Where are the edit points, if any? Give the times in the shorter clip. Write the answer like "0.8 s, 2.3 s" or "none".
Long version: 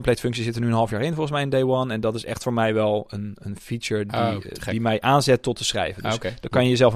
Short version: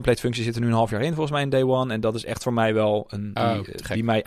3.4 s